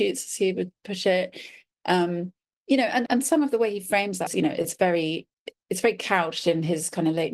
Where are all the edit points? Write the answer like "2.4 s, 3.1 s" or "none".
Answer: 3.1 s, 4.3 s

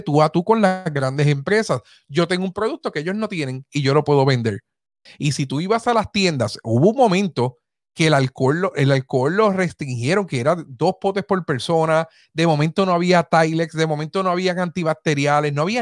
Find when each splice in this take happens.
5.1 s

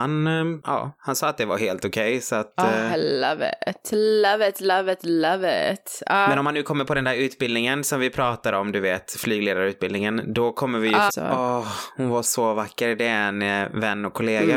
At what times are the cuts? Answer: 11.1 s, 12.2 s

